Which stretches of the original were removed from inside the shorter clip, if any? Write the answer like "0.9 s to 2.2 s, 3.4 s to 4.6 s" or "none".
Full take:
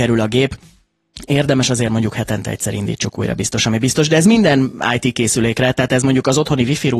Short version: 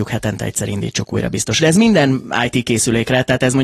3.6 s to 4.1 s